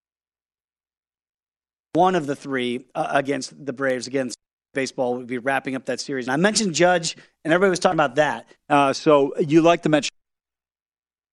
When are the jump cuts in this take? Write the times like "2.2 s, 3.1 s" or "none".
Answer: 6.3 s, 8.6 s